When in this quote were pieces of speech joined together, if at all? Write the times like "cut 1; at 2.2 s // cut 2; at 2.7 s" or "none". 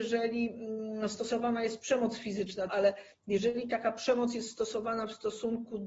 cut 1; at 2.7 s